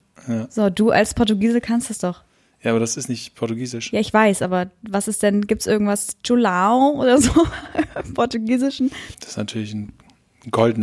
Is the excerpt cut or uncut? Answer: cut